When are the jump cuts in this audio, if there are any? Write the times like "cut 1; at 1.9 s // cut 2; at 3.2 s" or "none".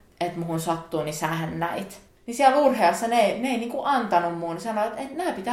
cut 1; at 2.2 s

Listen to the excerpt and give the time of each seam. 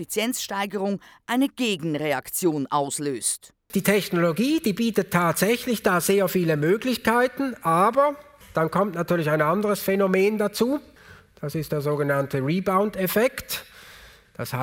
none

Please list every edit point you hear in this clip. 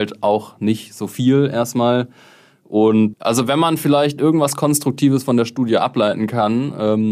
cut 1; at 3.1 s

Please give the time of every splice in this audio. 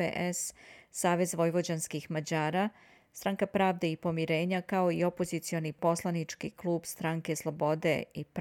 none

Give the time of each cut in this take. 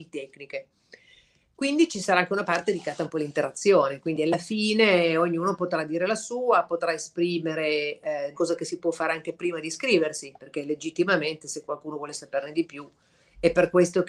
cut 1; at 8.3 s

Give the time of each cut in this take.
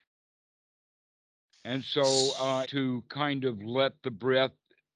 cut 1; at 2.6 s

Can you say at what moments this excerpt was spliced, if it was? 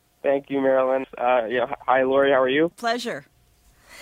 cut 1; at 1.0 s // cut 2; at 2.7 s

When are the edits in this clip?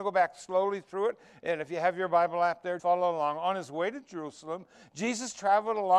cut 1; at 2.8 s

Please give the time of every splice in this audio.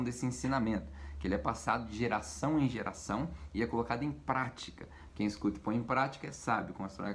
cut 1; at 5.1 s

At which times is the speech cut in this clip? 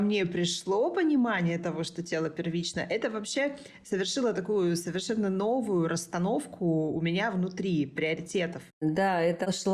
cut 1; at 8.7 s

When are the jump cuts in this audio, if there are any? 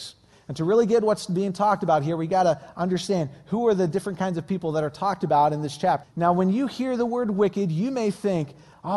cut 1; at 6.0 s

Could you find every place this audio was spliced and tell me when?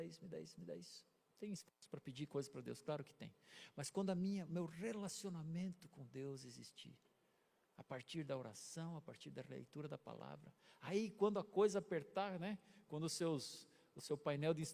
none

